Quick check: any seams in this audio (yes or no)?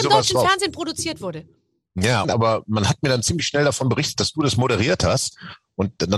yes